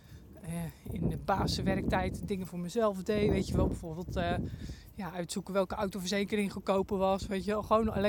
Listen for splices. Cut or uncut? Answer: uncut